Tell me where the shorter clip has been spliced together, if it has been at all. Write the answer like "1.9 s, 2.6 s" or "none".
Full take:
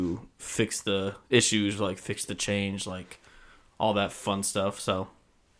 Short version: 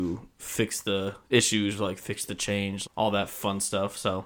2.9 s